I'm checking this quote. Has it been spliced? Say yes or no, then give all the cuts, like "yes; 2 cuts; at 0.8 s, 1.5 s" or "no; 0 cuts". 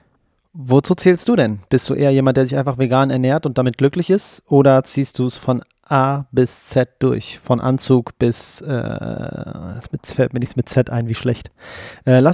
no; 0 cuts